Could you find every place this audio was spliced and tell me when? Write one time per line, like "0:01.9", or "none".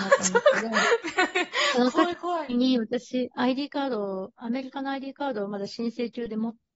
0:03.3